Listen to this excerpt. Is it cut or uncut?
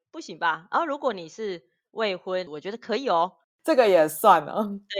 cut